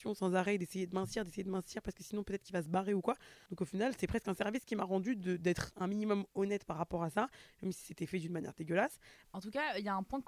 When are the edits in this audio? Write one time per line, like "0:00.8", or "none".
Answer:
0:03.5
0:09.2